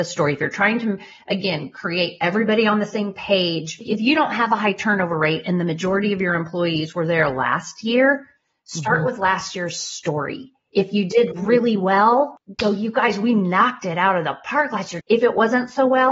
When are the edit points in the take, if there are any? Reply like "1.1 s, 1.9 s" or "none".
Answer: 15.0 s